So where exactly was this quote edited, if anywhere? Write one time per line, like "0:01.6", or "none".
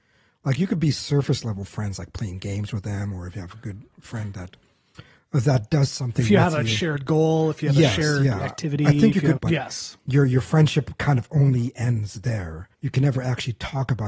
0:09.4
0:12.7